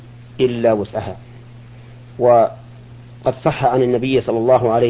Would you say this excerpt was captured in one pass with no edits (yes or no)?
yes